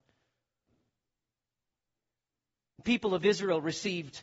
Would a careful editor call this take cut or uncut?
uncut